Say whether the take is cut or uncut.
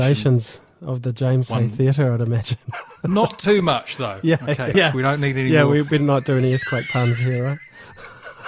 cut